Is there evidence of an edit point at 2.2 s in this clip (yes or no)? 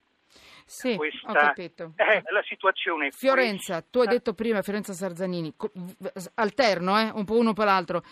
yes